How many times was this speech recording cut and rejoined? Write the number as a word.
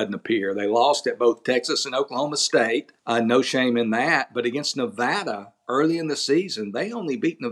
one